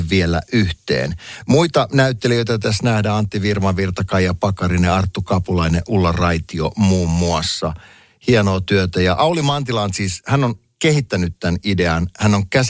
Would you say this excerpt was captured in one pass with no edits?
yes; 0 cuts

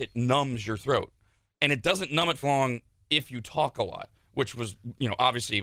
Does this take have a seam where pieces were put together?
yes; 1 cut; at 2.4 s

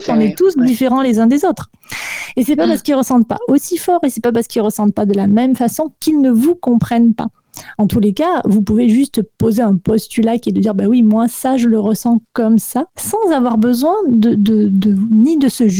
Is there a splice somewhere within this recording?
yes; 1 cut; at 12.9 s

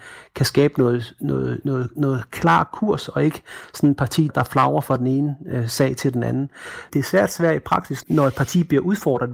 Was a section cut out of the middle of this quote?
yes; 3 cuts; at 4.3 s, 6.9 s, 8.0 s

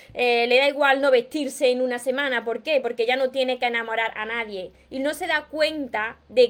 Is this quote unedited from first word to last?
yes; 0 cuts

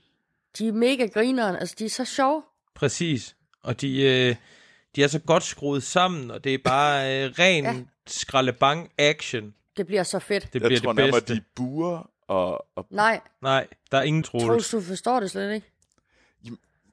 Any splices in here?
yes; 2 cuts; at 9.7 s, 14.2 s

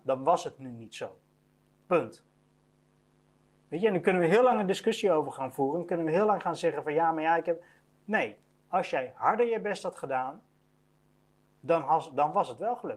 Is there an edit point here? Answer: no; 0 cuts

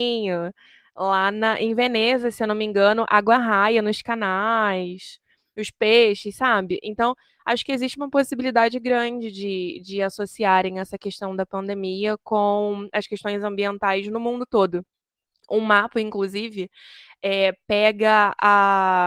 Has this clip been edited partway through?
no; 0 cuts

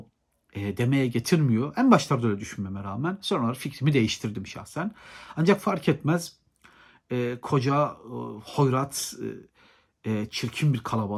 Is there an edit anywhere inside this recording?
no; 0 cuts

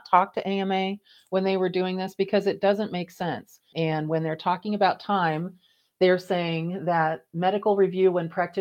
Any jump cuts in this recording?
yes; 1 cut; at 3.7 s

